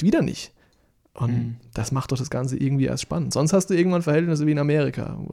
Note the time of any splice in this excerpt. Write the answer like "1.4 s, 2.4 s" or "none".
none

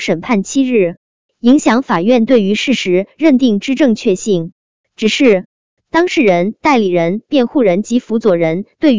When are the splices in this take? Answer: none

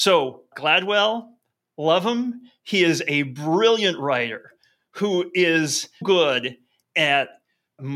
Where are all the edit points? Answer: 6.0 s

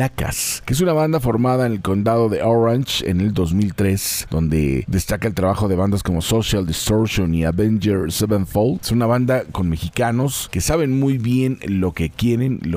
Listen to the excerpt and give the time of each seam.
8.8 s

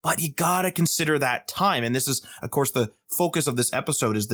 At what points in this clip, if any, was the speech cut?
none

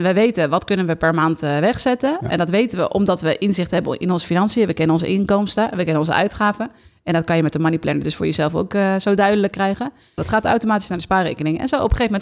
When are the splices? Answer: 10.2 s

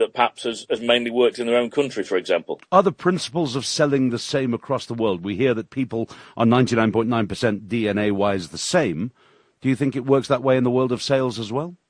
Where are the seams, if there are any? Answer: none

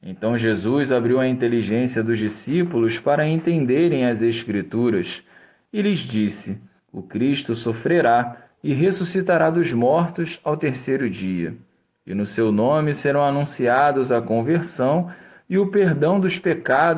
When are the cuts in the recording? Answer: 6.8 s

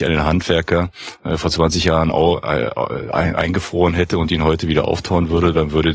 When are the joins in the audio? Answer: none

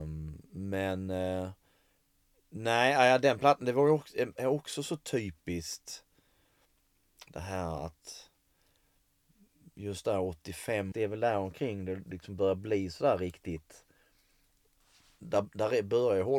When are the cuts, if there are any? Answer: 10.9 s

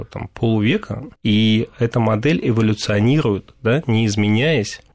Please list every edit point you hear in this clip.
1.2 s

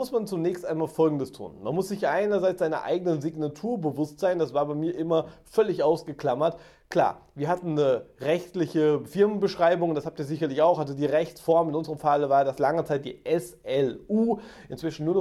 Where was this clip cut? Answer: none

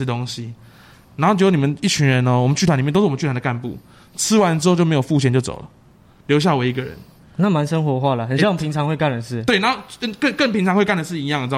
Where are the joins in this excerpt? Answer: none

